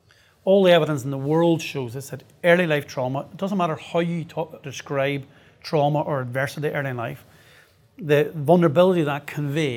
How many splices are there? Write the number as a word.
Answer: one